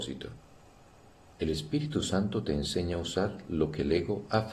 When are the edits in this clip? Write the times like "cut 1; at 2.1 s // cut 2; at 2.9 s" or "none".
cut 1; at 1.3 s